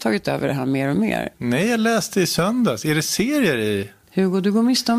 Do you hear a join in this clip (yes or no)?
yes